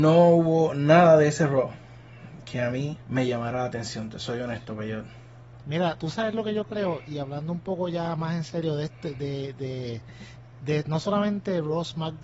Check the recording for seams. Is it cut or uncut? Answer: cut